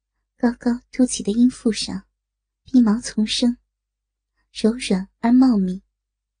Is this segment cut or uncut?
uncut